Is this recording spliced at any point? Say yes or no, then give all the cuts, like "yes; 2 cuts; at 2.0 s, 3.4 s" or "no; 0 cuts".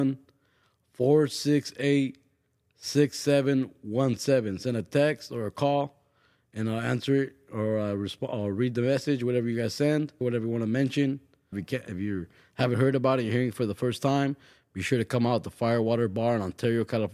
yes; 2 cuts; at 10.2 s, 11.5 s